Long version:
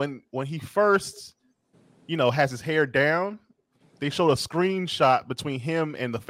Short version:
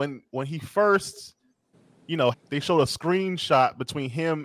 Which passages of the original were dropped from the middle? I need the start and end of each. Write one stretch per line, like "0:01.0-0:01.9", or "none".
0:02.3-0:03.8